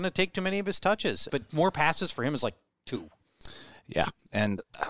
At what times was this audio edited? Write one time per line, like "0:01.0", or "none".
0:01.3